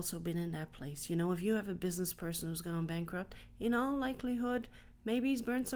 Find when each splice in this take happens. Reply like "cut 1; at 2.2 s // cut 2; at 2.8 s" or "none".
none